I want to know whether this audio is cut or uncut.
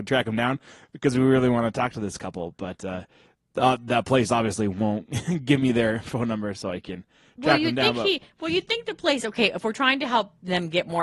uncut